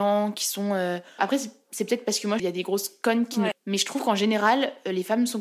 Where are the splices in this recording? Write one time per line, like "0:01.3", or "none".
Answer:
0:01.2
0:02.4
0:03.5